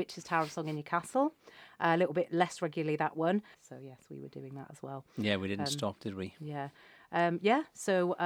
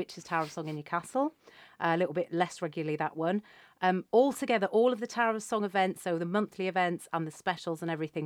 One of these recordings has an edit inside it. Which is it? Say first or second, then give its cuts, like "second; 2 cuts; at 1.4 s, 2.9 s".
first; 1 cut; at 3.5 s